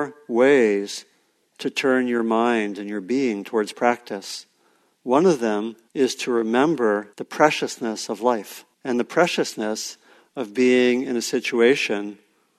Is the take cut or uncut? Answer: cut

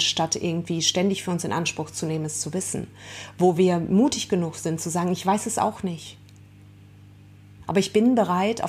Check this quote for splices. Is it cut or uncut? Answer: uncut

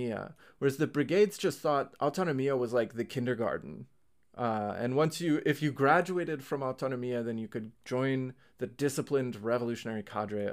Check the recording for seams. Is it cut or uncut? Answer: uncut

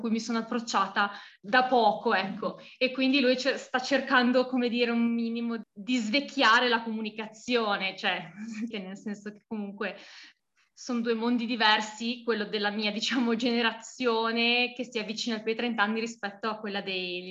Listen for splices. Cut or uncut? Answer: cut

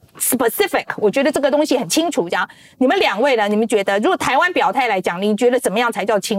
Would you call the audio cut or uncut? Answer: uncut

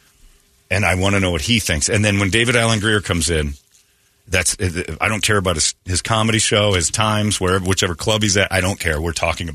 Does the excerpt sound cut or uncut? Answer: uncut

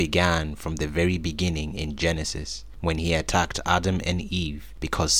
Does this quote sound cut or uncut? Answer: uncut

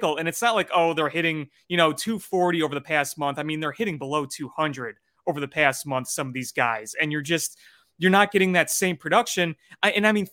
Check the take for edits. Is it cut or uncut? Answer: uncut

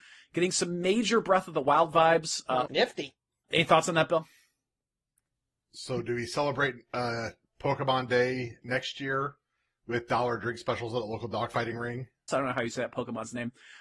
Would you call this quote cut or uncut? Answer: cut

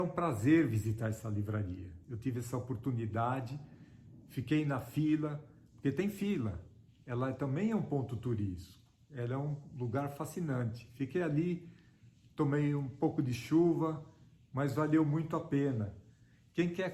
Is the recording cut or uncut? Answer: uncut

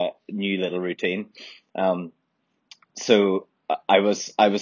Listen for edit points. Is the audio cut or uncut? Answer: uncut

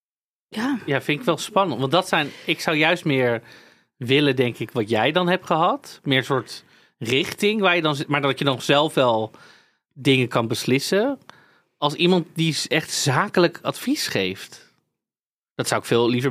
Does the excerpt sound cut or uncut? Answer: uncut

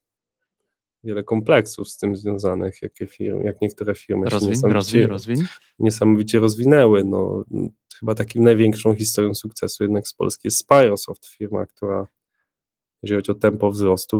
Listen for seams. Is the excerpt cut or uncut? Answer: uncut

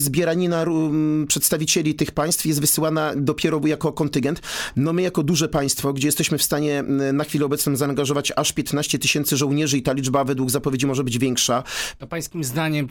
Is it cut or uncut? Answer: cut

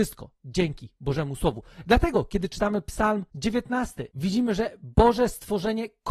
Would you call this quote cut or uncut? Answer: uncut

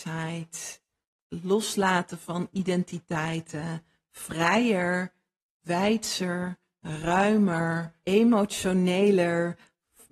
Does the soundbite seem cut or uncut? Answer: cut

